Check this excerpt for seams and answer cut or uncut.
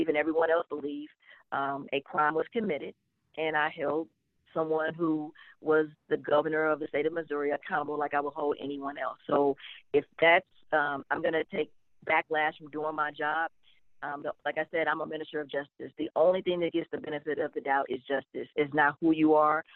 cut